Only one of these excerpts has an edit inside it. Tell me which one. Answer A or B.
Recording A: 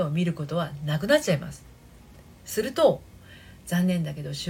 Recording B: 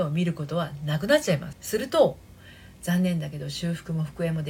B